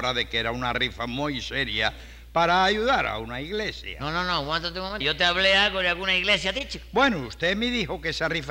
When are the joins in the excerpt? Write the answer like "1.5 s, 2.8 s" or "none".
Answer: 5.0 s